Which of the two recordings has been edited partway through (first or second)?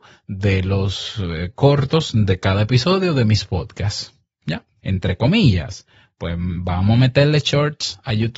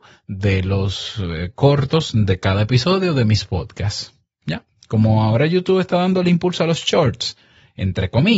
first